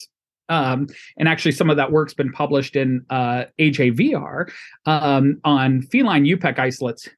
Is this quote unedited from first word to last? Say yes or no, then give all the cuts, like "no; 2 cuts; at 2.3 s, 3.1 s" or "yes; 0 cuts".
yes; 0 cuts